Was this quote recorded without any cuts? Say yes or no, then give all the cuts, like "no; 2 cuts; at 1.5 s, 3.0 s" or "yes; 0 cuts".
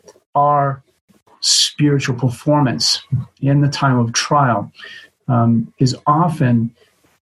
yes; 0 cuts